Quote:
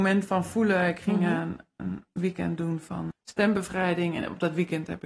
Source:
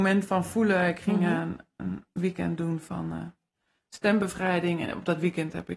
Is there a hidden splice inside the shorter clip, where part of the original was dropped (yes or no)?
yes